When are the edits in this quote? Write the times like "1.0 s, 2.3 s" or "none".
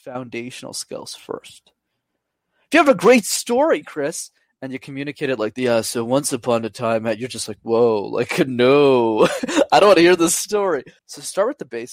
11.0 s